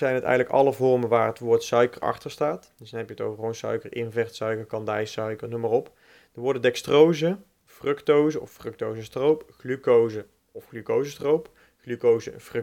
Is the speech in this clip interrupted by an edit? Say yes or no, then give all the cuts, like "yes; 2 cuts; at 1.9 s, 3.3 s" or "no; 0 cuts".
no; 0 cuts